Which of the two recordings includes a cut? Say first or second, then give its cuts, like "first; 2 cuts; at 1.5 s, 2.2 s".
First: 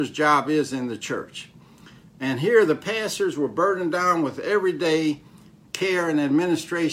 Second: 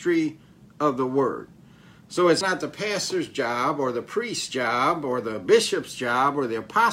second; 1 cut; at 2.4 s